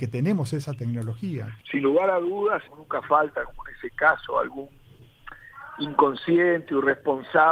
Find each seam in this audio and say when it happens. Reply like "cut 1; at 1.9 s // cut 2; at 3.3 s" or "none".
cut 1; at 1.6 s // cut 2; at 2.6 s